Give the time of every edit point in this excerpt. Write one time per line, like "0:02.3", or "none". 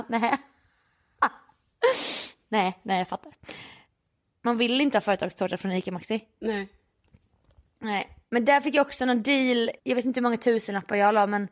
0:04.3
0:09.8